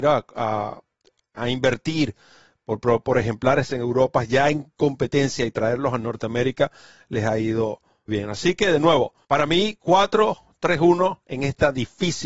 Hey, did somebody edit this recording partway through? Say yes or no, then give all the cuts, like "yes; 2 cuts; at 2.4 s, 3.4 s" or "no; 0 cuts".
yes; 2 cuts; at 8.1 s, 9.2 s